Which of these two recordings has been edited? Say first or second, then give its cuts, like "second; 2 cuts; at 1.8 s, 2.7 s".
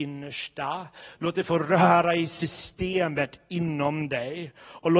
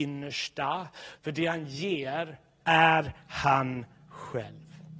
second; 2 cuts; at 1.2 s, 2.6 s